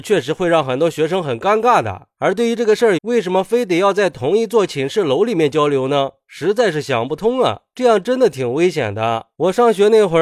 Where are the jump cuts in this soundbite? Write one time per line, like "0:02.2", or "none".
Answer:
0:03.0